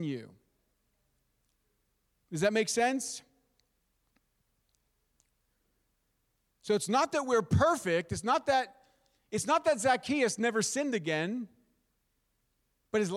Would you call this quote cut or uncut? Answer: uncut